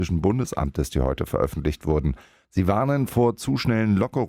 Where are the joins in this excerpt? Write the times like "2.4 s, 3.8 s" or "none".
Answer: 2.4 s